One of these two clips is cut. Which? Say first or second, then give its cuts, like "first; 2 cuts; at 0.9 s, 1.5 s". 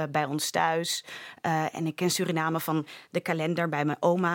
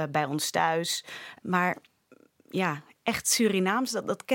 second; 1 cut; at 1.4 s